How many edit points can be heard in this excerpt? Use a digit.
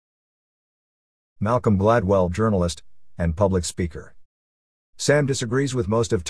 2